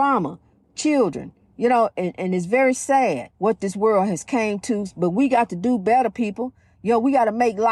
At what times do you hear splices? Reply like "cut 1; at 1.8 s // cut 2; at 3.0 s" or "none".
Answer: cut 1; at 3.3 s